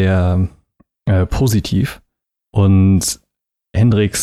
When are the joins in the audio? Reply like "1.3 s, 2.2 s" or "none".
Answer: none

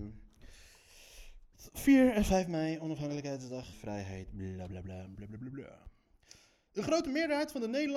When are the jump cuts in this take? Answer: 3.7 s, 5.2 s

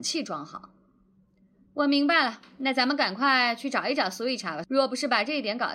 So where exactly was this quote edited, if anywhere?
1.7 s

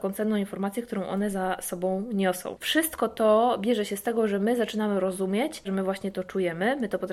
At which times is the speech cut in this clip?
2.6 s, 5.6 s

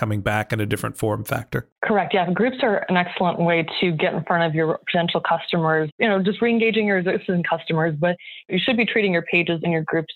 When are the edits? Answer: 1.8 s

